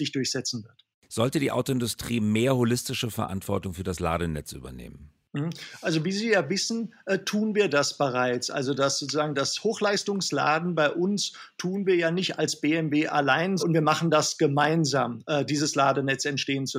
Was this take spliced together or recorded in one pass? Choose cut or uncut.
cut